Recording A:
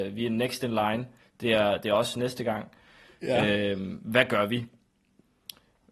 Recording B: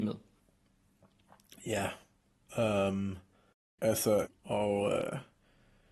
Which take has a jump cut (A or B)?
B